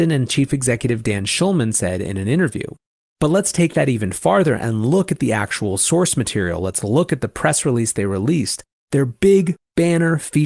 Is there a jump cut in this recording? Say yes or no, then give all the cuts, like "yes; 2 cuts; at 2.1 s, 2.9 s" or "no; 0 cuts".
no; 0 cuts